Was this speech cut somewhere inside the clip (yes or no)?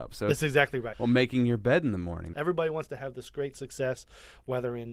yes